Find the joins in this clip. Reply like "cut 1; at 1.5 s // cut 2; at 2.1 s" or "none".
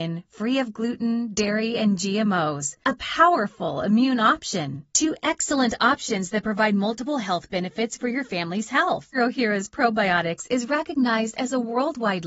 cut 1; at 4.9 s // cut 2; at 9.1 s